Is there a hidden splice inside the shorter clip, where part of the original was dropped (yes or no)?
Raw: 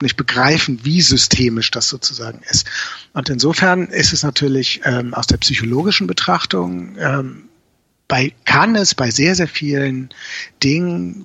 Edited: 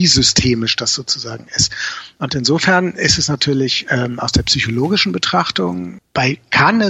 yes